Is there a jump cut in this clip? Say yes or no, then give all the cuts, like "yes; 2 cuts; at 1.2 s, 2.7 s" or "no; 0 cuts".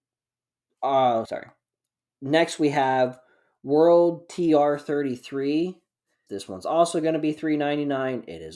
yes; 2 cuts; at 1.2 s, 6.3 s